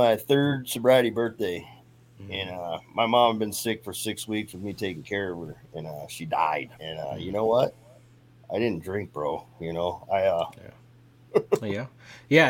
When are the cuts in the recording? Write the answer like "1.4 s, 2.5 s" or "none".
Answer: 6.7 s, 11.3 s